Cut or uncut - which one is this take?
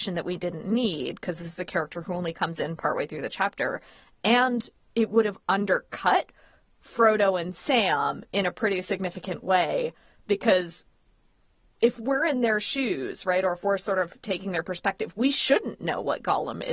uncut